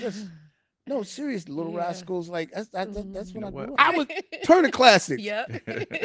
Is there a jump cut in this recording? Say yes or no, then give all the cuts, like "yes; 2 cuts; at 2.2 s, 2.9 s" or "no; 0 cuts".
yes; 1 cut; at 3.8 s